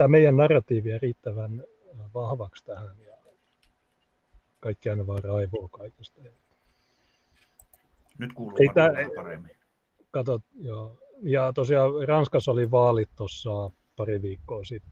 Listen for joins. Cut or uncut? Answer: uncut